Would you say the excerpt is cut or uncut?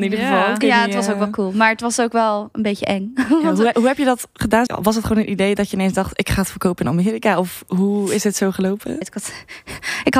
cut